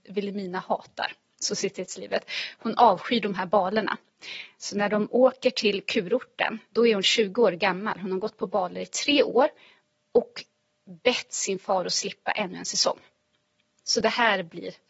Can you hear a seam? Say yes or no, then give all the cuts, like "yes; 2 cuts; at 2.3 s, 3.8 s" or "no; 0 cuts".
no; 0 cuts